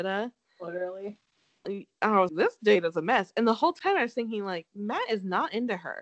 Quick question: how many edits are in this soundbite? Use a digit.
1